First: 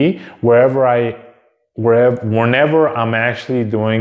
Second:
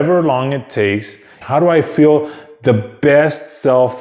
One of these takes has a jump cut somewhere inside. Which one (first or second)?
second